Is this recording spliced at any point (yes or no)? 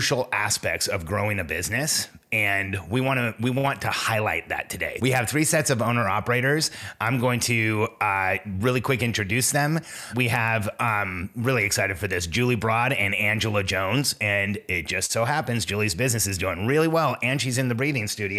no